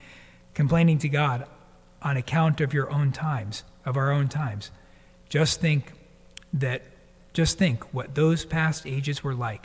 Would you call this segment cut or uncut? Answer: uncut